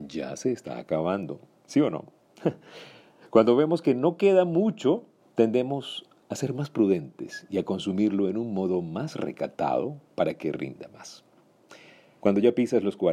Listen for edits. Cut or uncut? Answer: cut